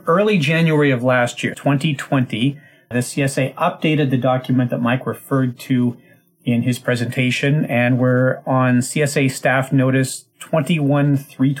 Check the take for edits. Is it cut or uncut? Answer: cut